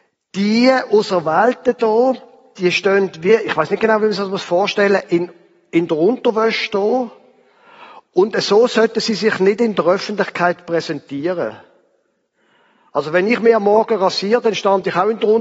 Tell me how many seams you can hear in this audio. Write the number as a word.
zero